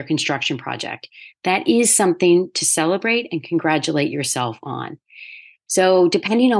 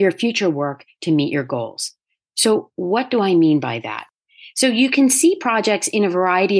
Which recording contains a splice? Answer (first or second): first